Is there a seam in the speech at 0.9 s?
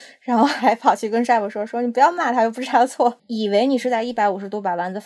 no; 1 cut; at 3.2 s

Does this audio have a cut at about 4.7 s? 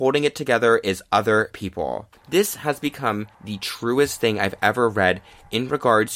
no; 2 cuts; at 2.1 s, 3.3 s

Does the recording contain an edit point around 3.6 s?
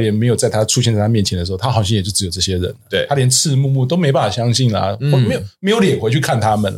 yes; 1 cut; at 3.6 s

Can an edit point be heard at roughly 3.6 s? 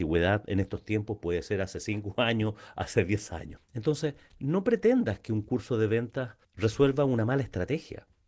yes; 2 cuts; at 3.6 s, 6.4 s

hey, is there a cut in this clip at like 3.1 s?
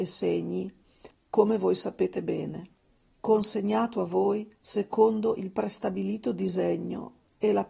no; 2 cuts; at 1.1 s, 4.6 s

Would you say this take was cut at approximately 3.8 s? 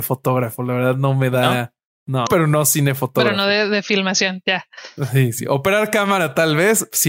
no; 1 cut; at 2.3 s

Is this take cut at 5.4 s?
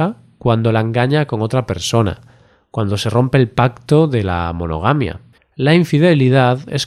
yes; 1 cut; at 5.4 s

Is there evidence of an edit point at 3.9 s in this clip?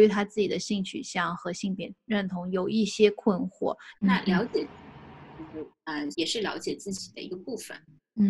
yes; 2 cuts; at 3.9 s, 6.1 s

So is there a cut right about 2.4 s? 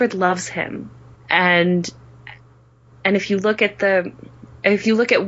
no; 1 cut; at 1.1 s

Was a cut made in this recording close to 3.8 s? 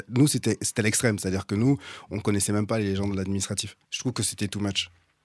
yes; 1 cut; at 3.8 s

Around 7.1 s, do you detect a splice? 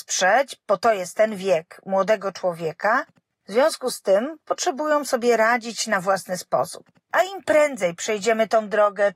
yes; 1 cut; at 7.1 s

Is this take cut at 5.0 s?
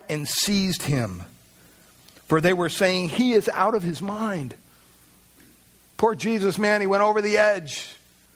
no; 0 cuts

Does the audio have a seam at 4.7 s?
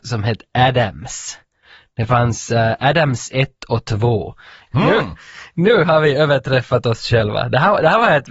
yes; 1 cut; at 4.7 s

